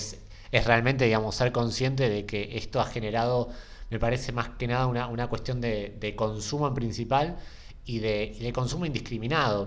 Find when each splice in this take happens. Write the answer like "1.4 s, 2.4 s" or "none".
none

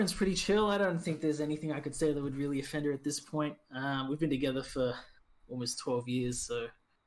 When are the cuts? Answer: none

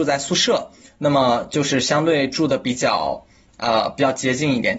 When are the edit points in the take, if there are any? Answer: none

